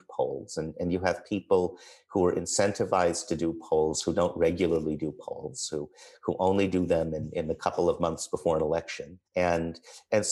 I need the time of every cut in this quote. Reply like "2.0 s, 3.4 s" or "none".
9.3 s